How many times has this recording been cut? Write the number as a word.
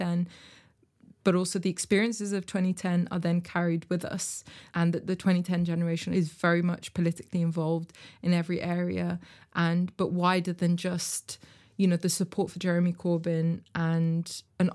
zero